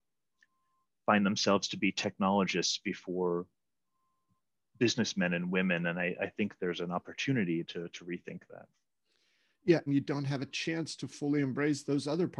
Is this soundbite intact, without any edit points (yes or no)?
no